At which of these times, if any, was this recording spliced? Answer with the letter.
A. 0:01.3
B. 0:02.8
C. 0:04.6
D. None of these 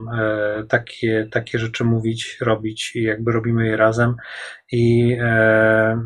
D